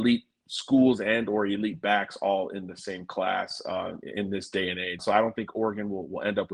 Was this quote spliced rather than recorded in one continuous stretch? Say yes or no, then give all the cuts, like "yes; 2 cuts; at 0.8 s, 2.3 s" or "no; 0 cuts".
yes; 1 cut; at 5.0 s